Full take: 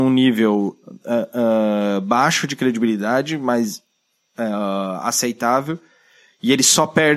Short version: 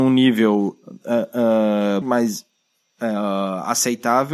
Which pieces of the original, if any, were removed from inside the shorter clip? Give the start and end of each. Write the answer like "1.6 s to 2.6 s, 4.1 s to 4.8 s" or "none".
2.0 s to 3.4 s